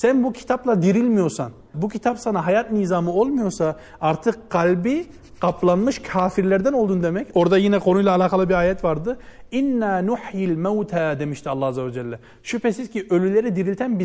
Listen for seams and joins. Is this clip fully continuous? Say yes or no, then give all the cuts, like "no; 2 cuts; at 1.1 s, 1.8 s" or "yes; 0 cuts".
no; 2 cuts; at 1.7 s, 7.3 s